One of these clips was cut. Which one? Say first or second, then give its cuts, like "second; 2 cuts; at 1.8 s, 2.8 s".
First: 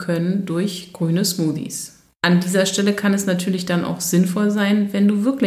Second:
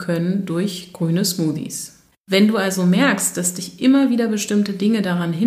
second; 1 cut; at 2.1 s